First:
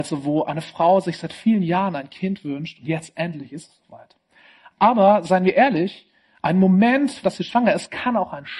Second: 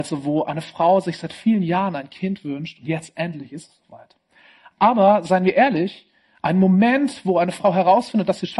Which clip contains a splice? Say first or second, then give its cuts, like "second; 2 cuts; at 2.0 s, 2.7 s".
first; 1 cut; at 7.2 s